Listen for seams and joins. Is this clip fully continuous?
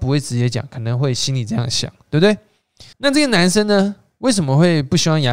no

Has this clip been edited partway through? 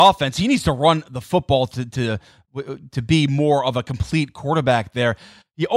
no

